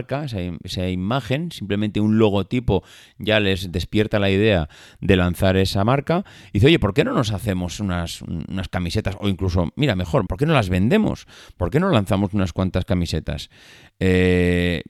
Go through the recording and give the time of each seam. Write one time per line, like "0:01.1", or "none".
0:10.3